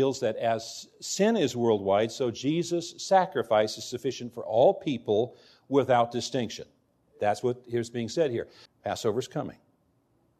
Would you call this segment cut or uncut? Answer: cut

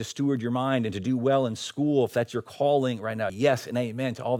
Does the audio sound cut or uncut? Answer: cut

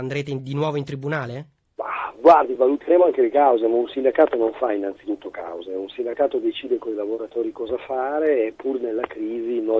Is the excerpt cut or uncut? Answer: uncut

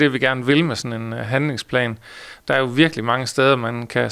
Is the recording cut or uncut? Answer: uncut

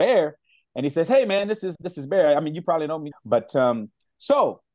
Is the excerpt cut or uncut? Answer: cut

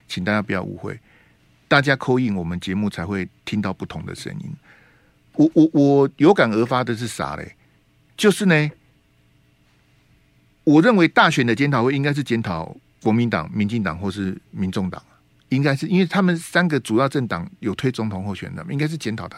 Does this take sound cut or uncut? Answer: uncut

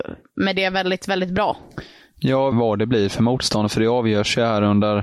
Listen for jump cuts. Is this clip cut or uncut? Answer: cut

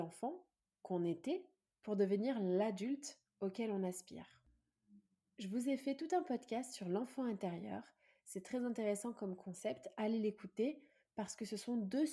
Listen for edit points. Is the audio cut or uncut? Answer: uncut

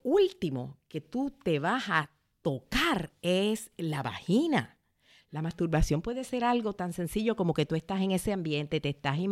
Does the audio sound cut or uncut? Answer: uncut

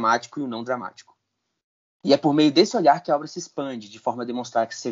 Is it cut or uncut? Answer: cut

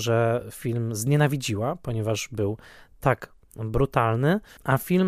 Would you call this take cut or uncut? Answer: uncut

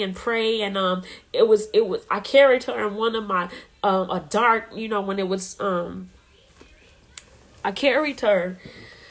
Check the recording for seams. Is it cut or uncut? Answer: cut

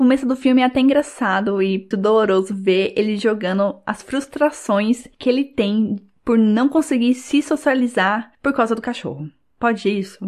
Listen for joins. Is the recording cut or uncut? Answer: cut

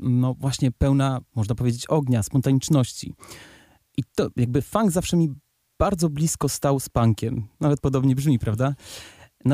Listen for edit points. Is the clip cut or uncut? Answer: uncut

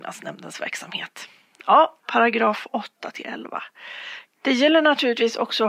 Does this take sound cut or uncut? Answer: cut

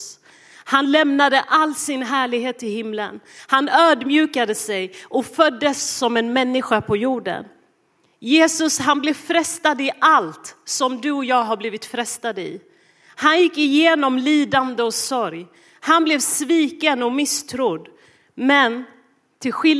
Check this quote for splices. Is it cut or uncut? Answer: uncut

